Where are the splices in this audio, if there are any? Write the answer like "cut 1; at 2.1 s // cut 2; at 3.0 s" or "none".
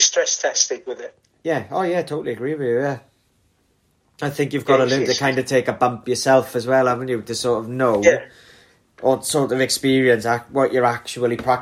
none

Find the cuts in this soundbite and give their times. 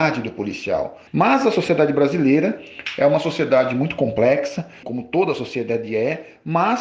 cut 1; at 1.1 s // cut 2; at 4.8 s

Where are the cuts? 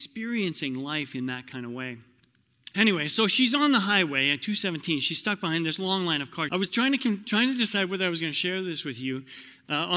cut 1; at 2.7 s // cut 2; at 6.5 s

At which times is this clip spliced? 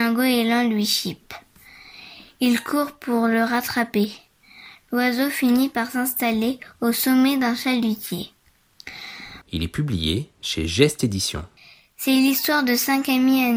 cut 1; at 9.4 s

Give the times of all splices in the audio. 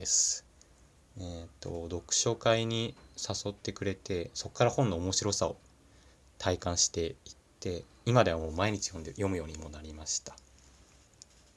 none

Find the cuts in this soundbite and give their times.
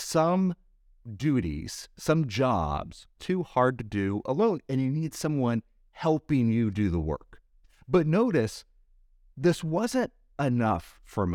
cut 1; at 3.2 s

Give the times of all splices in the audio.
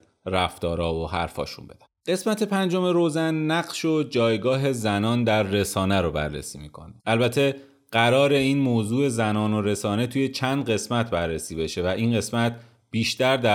cut 1; at 7.0 s

